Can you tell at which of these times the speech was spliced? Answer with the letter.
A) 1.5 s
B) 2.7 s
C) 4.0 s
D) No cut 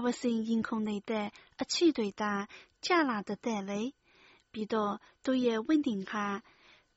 D